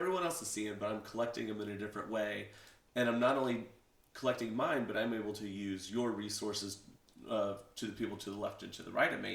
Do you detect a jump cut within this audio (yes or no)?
no